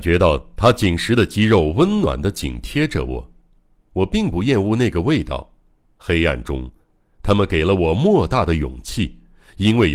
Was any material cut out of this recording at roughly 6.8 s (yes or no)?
no